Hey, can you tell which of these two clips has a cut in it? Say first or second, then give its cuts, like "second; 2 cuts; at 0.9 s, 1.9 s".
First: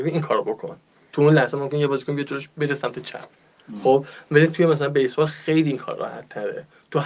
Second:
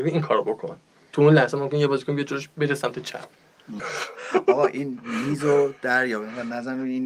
second; 1 cut; at 3.8 s